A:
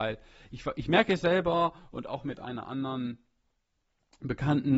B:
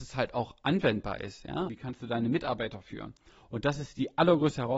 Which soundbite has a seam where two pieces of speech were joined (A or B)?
B